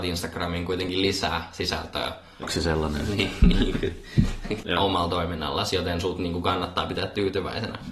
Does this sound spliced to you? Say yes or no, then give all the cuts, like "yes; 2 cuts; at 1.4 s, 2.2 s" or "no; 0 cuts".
yes; 2 cuts; at 2.4 s, 4.6 s